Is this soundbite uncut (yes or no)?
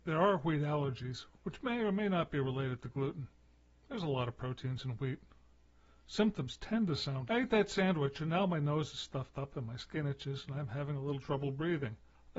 no